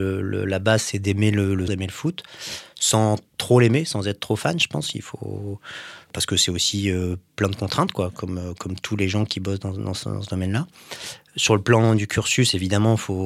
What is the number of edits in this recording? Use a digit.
1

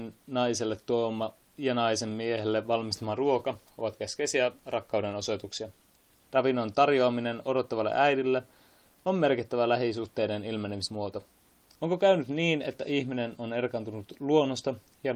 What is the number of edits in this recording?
2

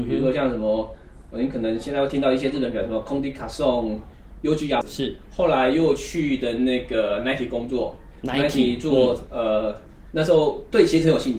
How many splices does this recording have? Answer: 2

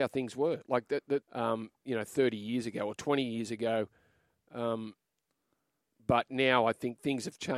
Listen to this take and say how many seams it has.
1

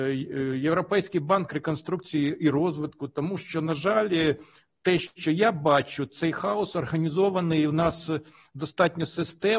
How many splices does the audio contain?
0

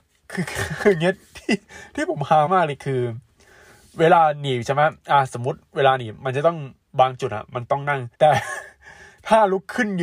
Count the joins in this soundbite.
2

